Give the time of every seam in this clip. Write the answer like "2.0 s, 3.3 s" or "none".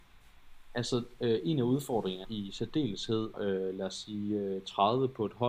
2.2 s, 3.3 s